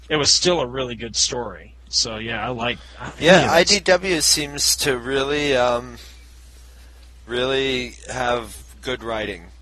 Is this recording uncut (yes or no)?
yes